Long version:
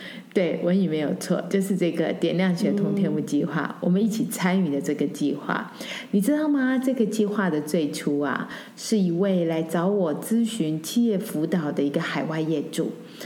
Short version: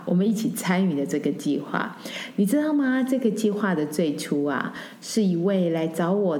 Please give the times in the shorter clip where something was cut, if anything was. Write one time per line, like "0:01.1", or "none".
none